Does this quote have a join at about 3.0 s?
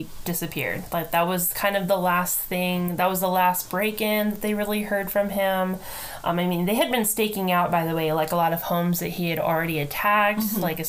no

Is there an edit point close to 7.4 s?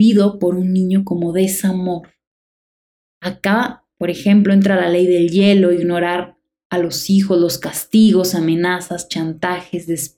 no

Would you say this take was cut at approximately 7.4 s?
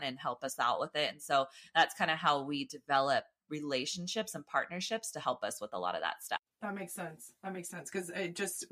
no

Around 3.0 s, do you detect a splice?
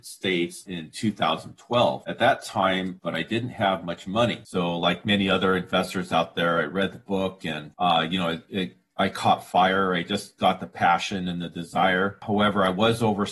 yes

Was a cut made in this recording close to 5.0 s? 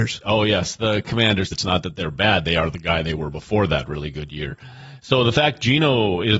no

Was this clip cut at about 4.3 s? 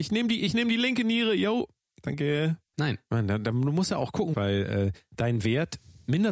yes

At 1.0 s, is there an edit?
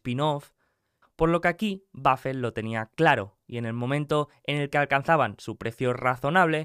yes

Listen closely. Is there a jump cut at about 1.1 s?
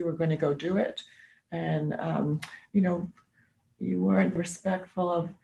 no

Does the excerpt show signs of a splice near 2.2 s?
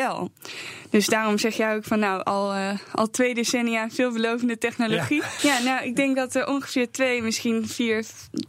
no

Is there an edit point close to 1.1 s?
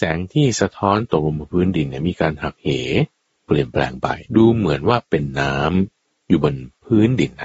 no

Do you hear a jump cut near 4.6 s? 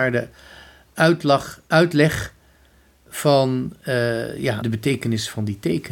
yes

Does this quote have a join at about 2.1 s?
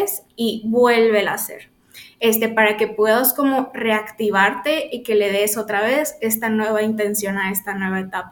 no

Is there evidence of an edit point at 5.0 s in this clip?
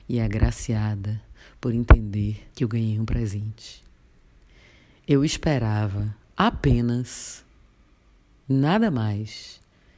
no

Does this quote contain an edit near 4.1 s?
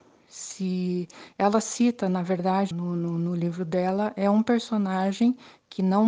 no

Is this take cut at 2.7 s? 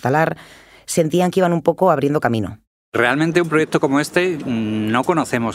no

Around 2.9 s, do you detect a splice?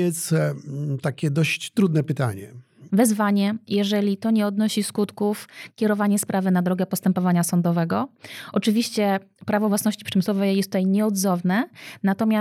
yes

